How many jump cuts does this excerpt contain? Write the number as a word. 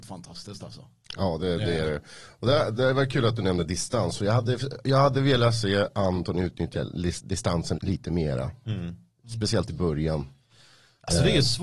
one